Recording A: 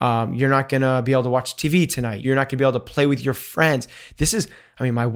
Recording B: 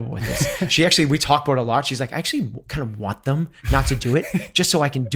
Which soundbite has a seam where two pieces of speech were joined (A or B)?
A